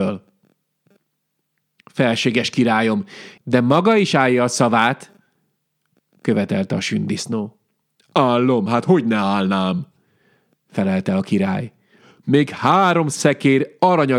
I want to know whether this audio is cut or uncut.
cut